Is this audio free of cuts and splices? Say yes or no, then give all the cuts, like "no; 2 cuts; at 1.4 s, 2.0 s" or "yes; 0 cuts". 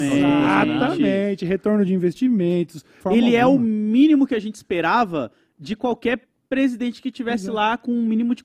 no; 1 cut; at 3.0 s